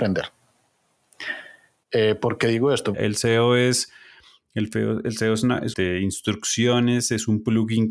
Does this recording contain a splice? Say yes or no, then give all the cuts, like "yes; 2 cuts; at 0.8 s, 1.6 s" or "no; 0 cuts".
yes; 2 cuts; at 2.9 s, 5.7 s